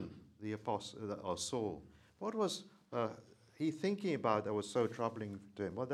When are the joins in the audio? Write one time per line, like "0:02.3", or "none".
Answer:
none